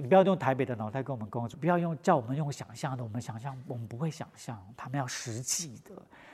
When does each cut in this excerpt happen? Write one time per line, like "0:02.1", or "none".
0:01.5